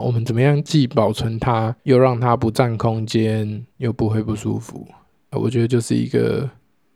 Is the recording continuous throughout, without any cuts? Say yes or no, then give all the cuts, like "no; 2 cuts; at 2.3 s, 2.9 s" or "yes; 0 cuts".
no; 1 cut; at 1.8 s